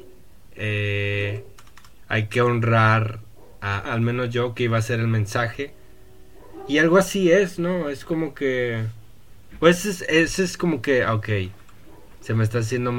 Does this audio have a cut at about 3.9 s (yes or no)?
yes